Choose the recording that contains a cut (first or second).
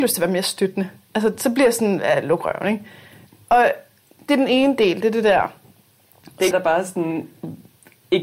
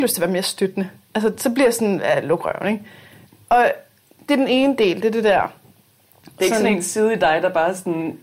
first